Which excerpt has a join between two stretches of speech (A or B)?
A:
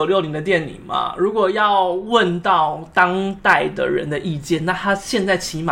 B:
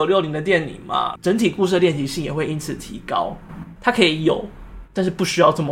B